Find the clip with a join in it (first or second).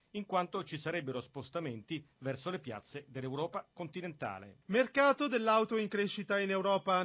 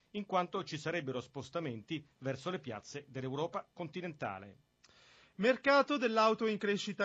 first